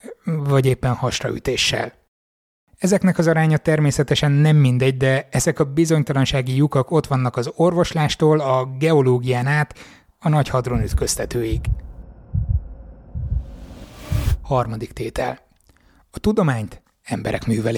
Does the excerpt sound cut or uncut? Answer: uncut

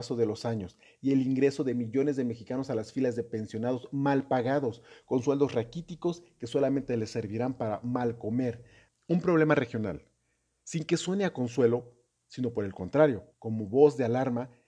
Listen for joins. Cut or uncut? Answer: cut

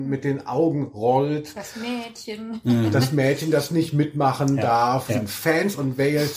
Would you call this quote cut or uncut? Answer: cut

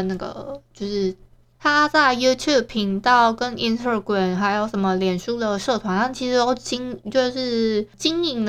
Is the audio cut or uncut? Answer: cut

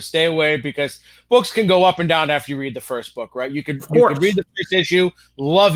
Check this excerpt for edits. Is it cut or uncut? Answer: uncut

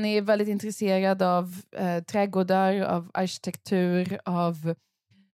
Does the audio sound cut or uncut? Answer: uncut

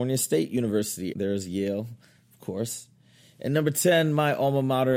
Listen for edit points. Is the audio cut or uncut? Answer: cut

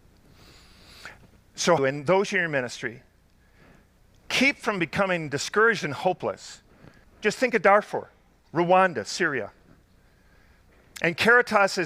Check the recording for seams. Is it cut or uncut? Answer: cut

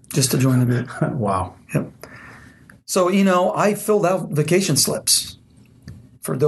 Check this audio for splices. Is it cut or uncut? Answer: uncut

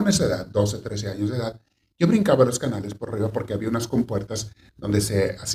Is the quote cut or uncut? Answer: uncut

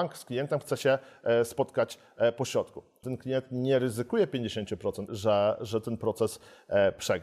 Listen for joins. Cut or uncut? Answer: cut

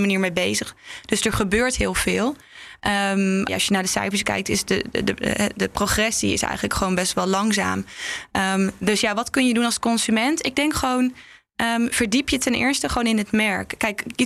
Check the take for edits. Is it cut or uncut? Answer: cut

